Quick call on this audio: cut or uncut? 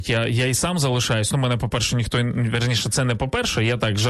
uncut